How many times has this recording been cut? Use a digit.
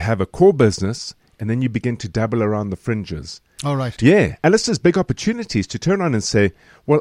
1